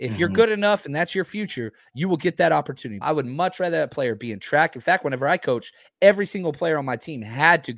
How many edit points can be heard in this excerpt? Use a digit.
1